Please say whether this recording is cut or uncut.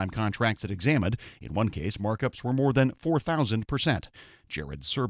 uncut